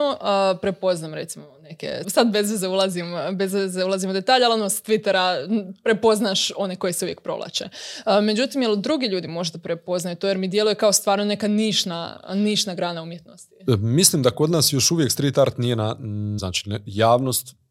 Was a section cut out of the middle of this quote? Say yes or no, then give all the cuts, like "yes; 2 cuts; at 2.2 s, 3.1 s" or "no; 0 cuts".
yes; 2 cuts; at 2.0 s, 16.4 s